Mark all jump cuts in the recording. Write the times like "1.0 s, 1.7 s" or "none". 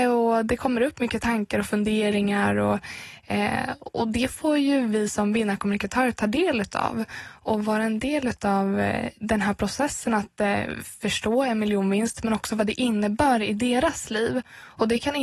none